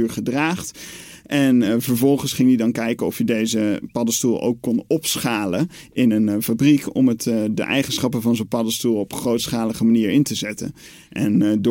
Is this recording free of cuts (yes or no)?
yes